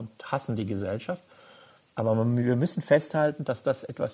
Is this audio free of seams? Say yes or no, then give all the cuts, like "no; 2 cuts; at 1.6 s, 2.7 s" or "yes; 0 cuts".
yes; 0 cuts